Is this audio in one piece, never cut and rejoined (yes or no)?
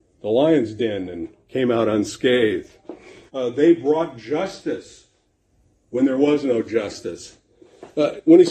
no